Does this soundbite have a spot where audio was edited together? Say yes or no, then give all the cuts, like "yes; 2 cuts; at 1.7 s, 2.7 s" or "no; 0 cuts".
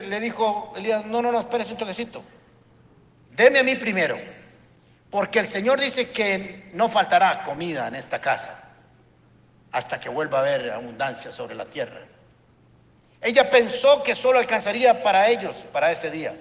no; 0 cuts